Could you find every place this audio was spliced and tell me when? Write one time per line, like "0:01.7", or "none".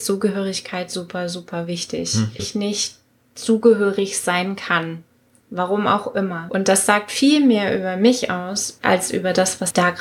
0:02.4